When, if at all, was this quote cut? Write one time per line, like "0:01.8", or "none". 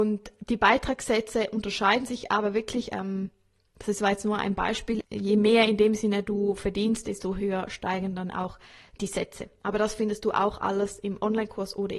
0:05.0
0:09.0